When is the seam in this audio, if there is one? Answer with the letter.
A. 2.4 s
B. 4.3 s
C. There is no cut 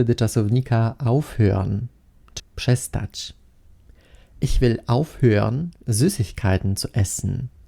A